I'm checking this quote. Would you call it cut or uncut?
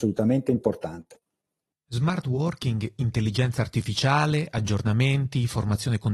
uncut